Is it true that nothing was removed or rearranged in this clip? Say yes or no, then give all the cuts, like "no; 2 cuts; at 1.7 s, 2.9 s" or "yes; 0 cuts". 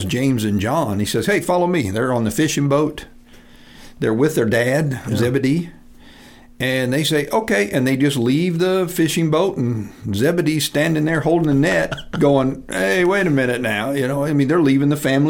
yes; 0 cuts